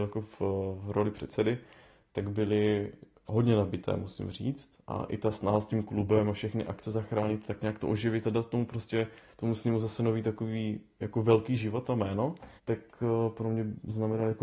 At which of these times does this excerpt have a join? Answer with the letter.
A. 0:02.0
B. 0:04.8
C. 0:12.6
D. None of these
C